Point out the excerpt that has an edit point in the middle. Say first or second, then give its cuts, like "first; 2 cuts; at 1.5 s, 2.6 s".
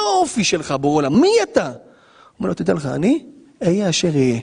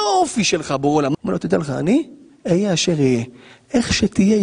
second; 1 cut; at 1.1 s